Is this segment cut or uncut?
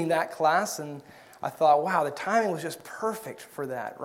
uncut